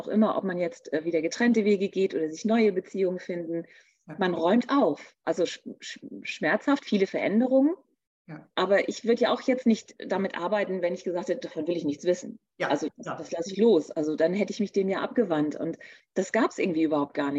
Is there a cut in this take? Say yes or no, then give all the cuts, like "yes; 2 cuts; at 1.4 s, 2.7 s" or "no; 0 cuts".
yes; 2 cuts; at 5.2 s, 8.5 s